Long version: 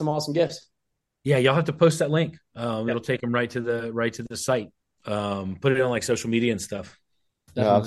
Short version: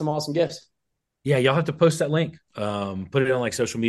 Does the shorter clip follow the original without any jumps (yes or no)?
no